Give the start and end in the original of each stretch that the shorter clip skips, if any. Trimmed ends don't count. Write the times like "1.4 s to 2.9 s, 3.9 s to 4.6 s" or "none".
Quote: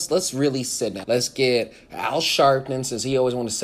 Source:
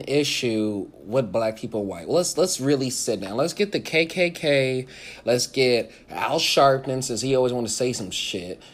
3.3 s to 5.2 s